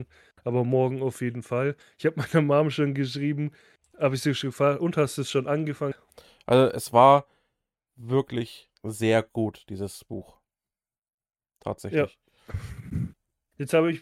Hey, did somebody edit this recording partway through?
yes; 1 cut; at 5.9 s

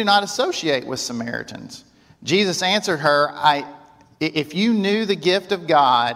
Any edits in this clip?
no; 0 cuts

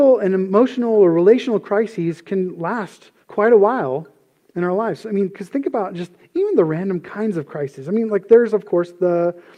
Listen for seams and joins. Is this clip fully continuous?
no; 1 cut; at 3.2 s

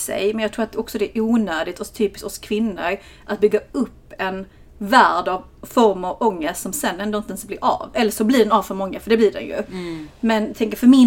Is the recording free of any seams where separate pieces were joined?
yes; 0 cuts

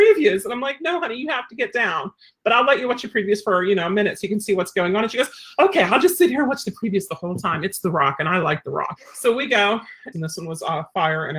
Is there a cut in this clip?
yes; 2 cuts; at 9.0 s, 10.1 s

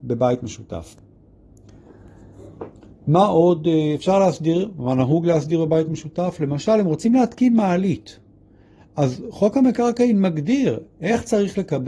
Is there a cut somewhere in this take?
no; 0 cuts

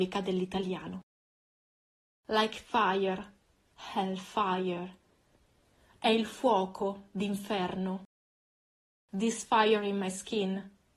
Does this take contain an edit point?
no; 0 cuts

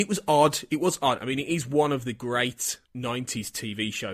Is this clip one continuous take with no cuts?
no; 2 cuts; at 1.2 s, 2.8 s

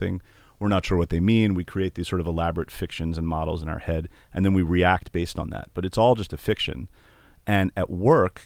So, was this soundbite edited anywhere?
no; 0 cuts

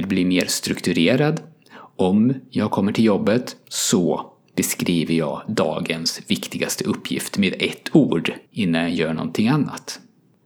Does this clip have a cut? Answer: yes; 1 cut; at 8.5 s

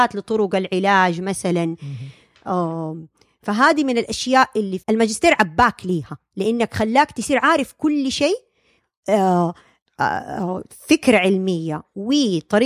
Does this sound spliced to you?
yes; 1 cut; at 4.8 s

